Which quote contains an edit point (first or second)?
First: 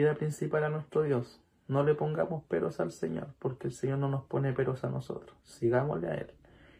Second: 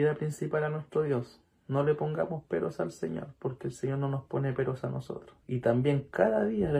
second